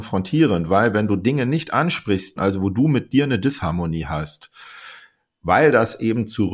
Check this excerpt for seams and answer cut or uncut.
cut